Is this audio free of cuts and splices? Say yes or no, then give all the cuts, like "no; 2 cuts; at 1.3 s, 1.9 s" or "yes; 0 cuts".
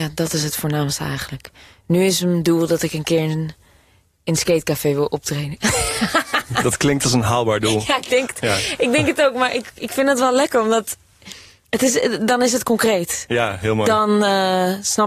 yes; 0 cuts